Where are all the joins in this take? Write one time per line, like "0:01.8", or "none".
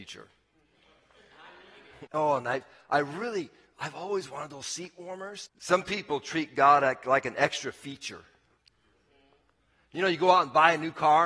0:02.1
0:05.5